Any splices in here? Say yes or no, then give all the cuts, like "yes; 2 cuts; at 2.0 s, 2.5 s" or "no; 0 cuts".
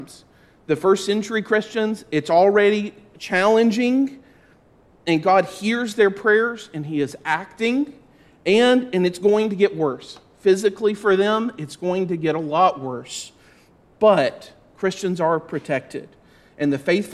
no; 0 cuts